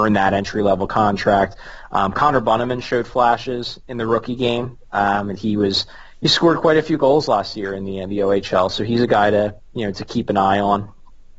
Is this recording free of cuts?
yes; 0 cuts

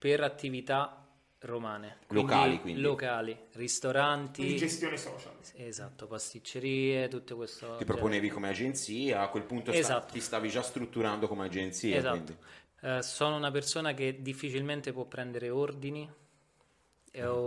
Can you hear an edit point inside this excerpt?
yes; 1 cut; at 12.7 s

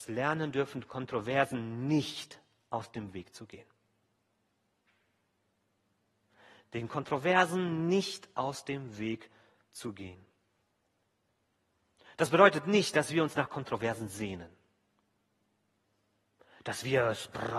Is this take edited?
no; 0 cuts

